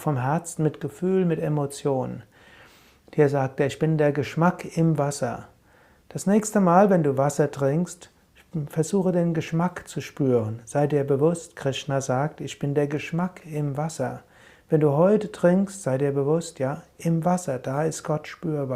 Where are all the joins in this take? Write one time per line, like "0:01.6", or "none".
none